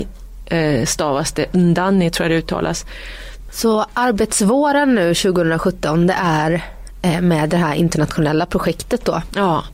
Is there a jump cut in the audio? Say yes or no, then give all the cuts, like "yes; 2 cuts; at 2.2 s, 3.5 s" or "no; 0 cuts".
yes; 1 cut; at 3.5 s